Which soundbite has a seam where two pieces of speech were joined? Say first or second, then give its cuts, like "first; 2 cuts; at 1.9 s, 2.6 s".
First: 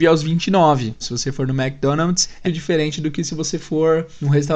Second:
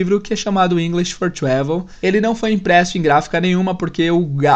first; 2 cuts; at 1.0 s, 2.4 s